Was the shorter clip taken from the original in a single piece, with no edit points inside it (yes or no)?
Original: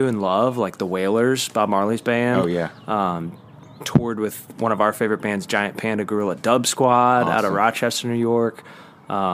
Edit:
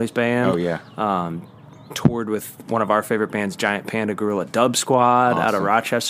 yes